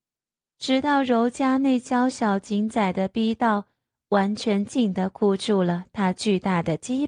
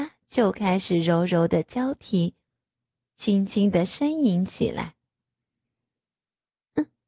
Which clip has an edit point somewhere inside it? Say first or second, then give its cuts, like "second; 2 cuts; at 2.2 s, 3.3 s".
first; 1 cut; at 4.7 s